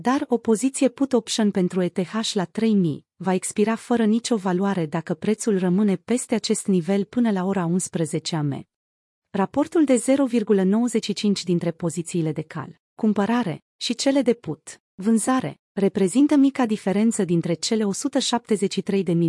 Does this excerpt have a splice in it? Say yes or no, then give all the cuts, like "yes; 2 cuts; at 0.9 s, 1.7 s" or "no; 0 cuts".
yes; 1 cut; at 9.2 s